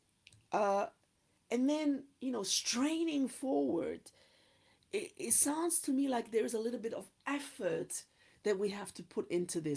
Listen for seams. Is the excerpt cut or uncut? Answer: uncut